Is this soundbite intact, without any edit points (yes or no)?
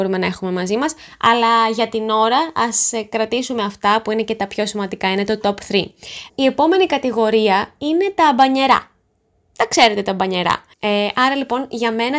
no